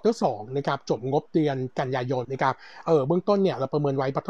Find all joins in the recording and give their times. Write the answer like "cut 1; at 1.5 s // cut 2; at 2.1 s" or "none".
cut 1; at 2.2 s